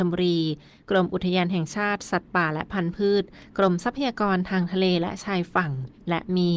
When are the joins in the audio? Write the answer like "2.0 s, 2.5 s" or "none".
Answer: none